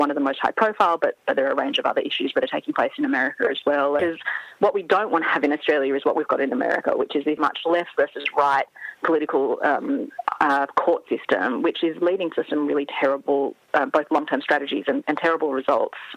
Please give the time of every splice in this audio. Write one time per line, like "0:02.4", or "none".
0:04.0
0:07.4